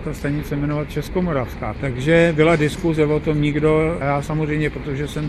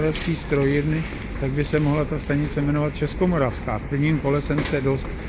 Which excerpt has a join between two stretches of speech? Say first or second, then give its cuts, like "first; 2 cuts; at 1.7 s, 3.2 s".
first; 2 cuts; at 1.7 s, 4.0 s